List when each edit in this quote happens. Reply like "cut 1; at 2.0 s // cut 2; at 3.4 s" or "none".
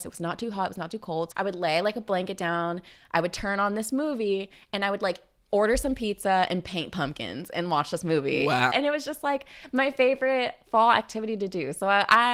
cut 1; at 1.3 s // cut 2; at 8.7 s